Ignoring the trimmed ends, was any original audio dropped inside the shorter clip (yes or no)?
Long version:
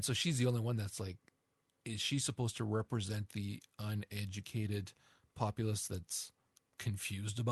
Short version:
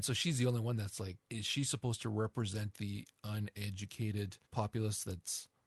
yes